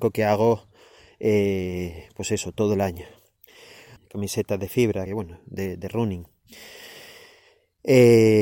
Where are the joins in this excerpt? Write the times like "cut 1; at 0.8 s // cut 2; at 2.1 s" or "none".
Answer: cut 1; at 4.0 s // cut 2; at 5.1 s